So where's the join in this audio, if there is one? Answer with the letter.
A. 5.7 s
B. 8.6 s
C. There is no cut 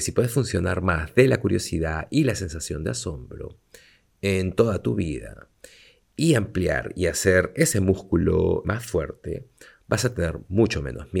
B